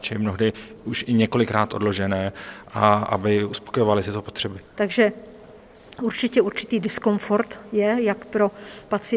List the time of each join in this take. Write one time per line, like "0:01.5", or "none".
0:04.7